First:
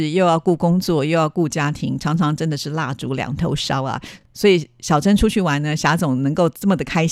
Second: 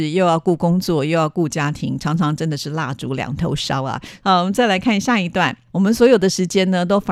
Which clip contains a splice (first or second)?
second